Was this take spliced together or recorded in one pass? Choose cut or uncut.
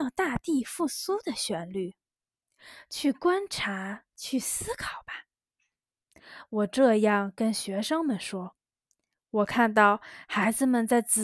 cut